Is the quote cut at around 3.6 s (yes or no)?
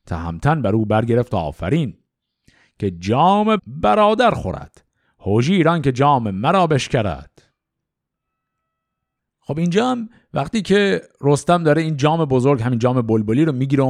yes